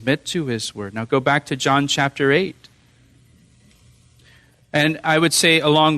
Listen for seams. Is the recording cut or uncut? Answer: uncut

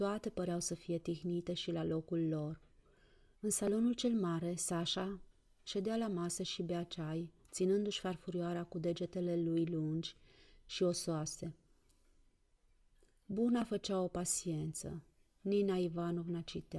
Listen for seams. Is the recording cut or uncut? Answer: cut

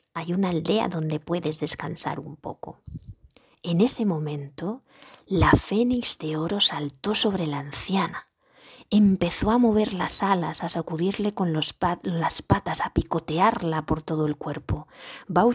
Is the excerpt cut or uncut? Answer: uncut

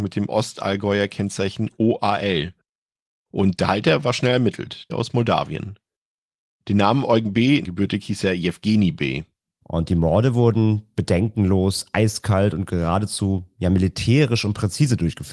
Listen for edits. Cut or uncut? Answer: cut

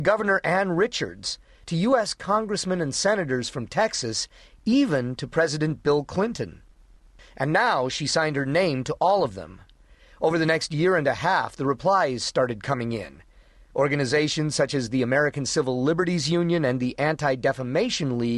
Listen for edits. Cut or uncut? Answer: uncut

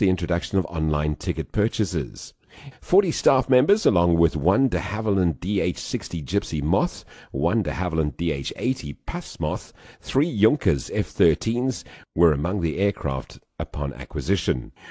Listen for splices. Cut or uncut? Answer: cut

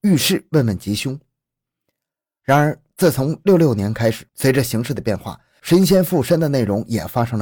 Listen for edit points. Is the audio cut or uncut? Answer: cut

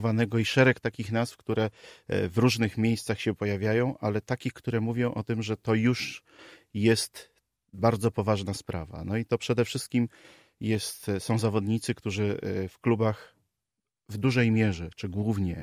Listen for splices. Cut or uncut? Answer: uncut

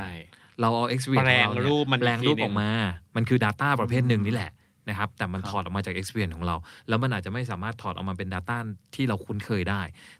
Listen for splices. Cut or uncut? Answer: uncut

